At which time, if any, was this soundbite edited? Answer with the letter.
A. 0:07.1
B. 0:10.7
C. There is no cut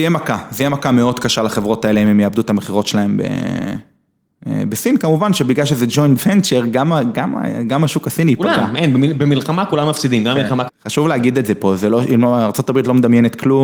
B